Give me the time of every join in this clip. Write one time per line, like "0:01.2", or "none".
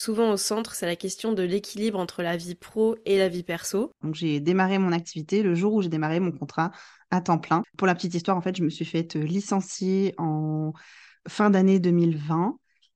0:04.0